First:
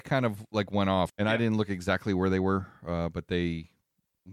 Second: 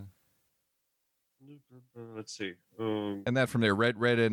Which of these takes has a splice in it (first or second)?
first